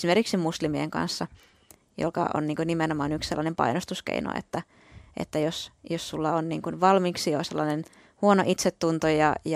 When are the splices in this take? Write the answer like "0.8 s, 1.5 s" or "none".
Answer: none